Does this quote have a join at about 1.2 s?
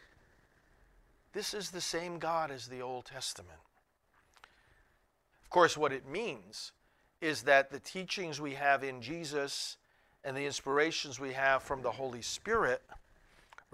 no; 1 cut; at 5.3 s

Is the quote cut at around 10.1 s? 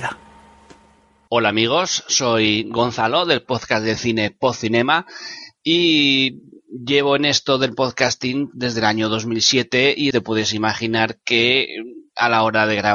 yes; 2 cuts; at 1.3 s, 10.1 s

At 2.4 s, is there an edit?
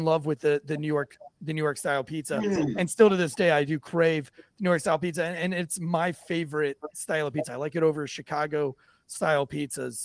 no; 0 cuts

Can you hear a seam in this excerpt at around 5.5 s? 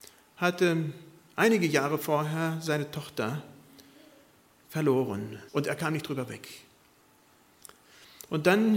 yes; 1 cut; at 5.5 s

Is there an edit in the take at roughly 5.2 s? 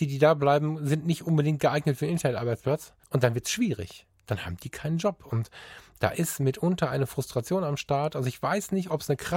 no; 1 cut; at 3.0 s

